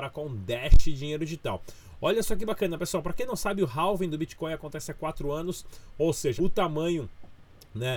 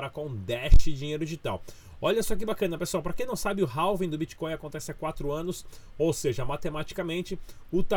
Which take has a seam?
first; 1 cut; at 6.4 s

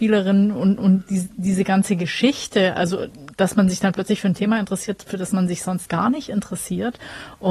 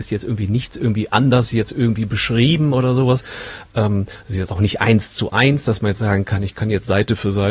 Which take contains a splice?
first; 1 cut; at 5.9 s

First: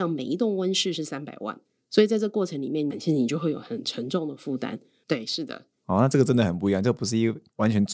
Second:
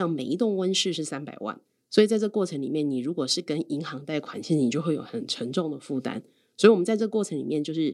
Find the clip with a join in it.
first; 2 cuts; at 2.9 s, 5.0 s

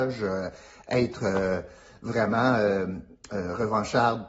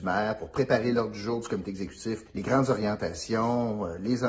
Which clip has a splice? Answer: second; 1 cut; at 2.3 s

